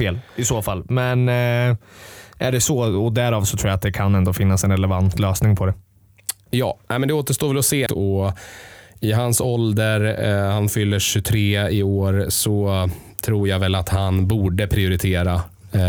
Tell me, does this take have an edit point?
yes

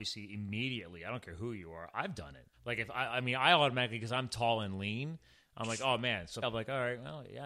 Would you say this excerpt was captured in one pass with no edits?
no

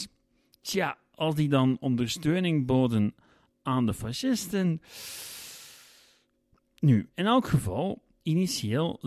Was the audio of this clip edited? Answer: no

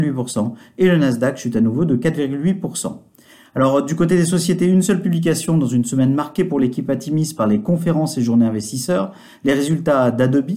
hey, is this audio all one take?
yes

